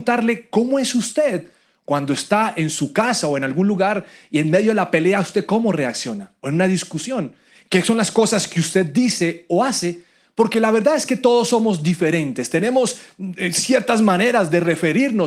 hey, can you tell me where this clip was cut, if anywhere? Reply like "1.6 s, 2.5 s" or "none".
none